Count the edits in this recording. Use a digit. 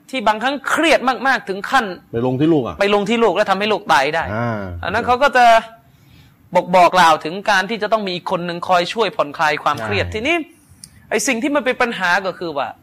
1